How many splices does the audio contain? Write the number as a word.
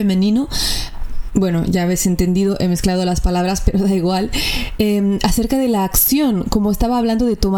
zero